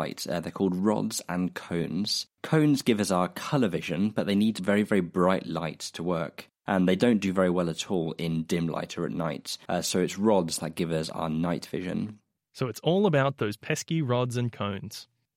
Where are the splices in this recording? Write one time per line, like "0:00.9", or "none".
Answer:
0:09.7